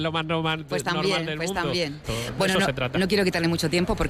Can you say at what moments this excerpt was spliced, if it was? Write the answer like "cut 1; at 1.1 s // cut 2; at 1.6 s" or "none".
cut 1; at 2.0 s